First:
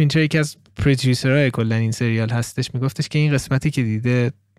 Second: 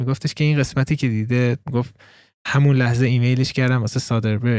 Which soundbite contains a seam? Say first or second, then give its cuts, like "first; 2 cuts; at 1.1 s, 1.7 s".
second; 1 cut; at 1.6 s